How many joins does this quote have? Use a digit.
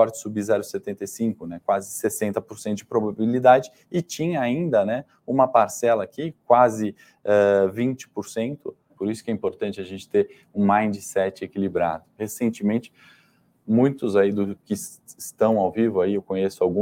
2